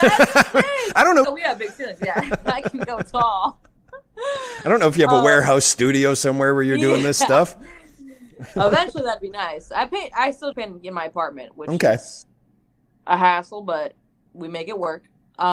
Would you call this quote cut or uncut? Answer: cut